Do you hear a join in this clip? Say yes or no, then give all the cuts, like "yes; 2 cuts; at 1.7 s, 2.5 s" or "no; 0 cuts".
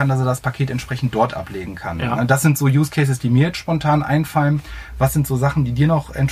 no; 0 cuts